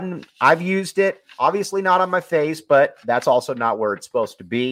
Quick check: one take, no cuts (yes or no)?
yes